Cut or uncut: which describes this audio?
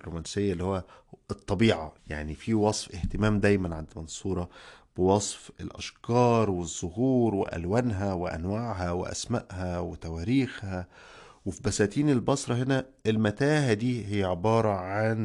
cut